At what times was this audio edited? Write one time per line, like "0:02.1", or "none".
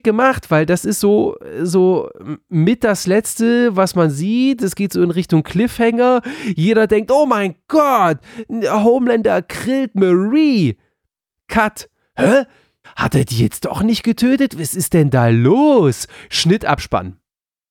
0:12.8